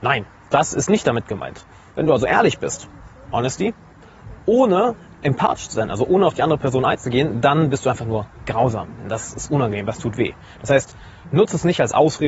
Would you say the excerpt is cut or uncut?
cut